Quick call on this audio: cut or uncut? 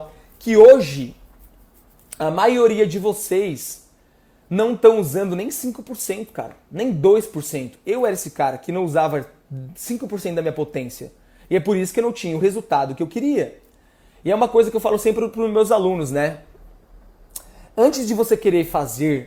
uncut